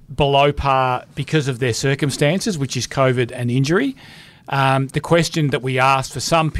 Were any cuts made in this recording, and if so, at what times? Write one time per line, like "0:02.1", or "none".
none